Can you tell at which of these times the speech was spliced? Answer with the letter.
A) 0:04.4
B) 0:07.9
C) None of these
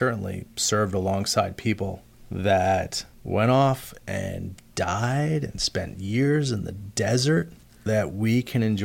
B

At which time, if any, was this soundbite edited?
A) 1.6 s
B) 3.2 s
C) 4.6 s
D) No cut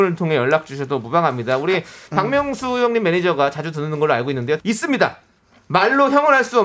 C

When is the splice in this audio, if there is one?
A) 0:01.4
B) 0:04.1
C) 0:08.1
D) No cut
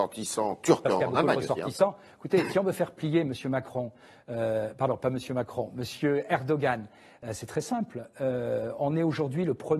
D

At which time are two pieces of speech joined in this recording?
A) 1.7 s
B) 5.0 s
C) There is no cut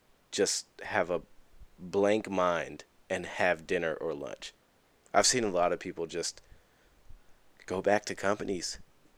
B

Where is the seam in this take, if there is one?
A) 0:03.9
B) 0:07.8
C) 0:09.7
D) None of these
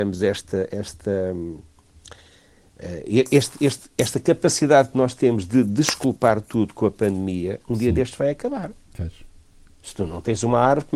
C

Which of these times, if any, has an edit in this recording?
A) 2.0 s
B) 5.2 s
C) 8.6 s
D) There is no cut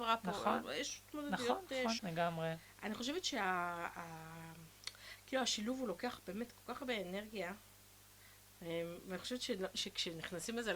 A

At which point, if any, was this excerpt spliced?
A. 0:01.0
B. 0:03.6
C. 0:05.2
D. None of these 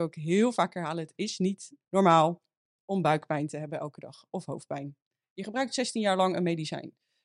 C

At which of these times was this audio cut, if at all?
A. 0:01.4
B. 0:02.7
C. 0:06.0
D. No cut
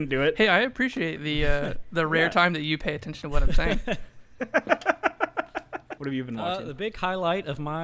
C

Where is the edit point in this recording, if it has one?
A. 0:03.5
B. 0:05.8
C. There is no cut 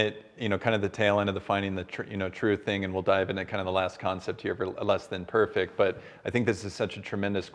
C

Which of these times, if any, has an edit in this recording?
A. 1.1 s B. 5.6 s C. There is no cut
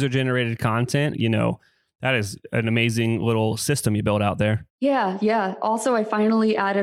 A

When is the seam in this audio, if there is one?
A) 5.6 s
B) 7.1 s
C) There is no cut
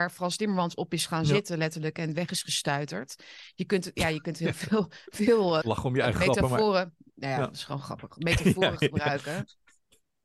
A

